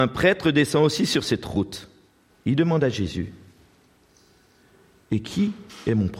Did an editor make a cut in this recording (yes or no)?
yes